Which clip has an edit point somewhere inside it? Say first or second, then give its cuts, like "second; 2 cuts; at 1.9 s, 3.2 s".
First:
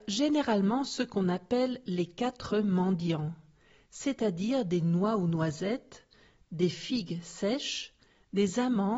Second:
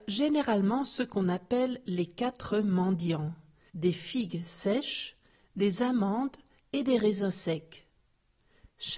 second; 1 cut; at 3.7 s